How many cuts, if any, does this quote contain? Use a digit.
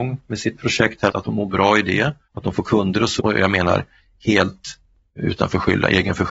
2